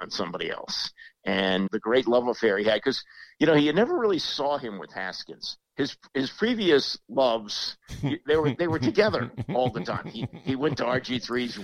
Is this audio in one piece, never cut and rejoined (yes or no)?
no